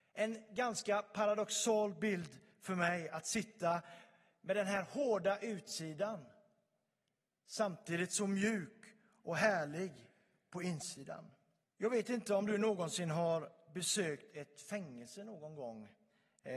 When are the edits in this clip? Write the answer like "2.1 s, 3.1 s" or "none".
11.6 s